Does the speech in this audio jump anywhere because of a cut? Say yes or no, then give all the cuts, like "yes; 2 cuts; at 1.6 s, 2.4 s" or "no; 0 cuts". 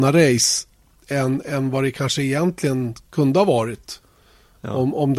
no; 0 cuts